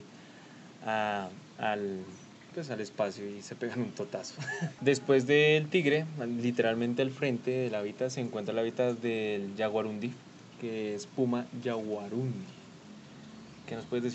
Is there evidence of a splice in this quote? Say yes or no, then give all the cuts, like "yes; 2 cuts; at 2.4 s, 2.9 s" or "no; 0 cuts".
yes; 1 cut; at 4.8 s